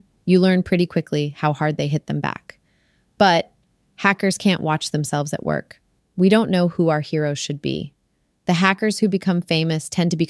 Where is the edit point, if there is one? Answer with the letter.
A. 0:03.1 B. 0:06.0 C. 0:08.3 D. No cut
B